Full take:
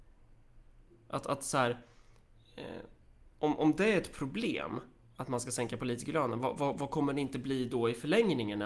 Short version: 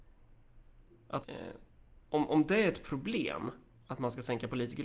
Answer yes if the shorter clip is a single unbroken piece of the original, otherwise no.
no